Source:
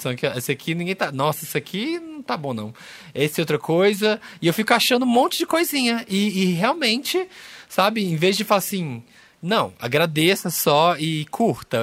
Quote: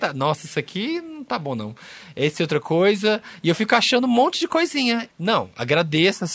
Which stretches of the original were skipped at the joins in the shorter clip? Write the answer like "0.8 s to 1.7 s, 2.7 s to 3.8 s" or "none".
6.1 s to 9.3 s